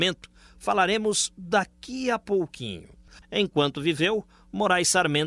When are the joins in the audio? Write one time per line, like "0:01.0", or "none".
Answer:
0:03.2